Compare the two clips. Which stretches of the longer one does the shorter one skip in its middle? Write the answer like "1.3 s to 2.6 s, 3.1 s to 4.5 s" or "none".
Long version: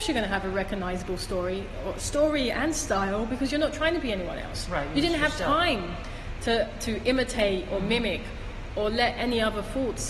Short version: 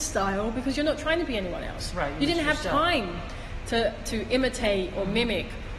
none